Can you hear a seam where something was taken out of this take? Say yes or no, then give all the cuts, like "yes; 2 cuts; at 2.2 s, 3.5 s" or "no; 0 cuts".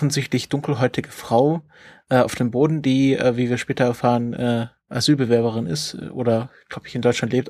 no; 0 cuts